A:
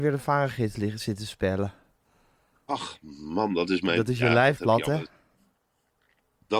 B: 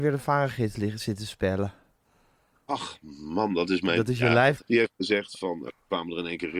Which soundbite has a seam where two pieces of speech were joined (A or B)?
B